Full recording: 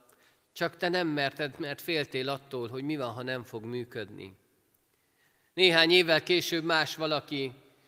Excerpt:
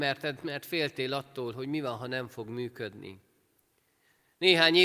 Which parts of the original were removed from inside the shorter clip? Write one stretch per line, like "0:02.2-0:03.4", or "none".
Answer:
none